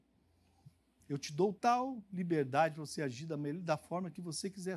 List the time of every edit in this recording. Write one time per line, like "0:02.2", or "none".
0:01.6